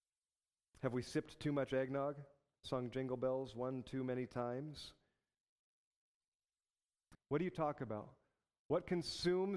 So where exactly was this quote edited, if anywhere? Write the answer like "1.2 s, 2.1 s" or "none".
2.6 s, 7.1 s